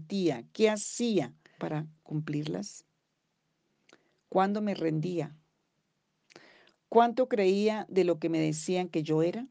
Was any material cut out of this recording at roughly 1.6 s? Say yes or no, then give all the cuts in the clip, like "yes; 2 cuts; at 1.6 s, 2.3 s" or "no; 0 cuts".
yes; 1 cut; at 1.6 s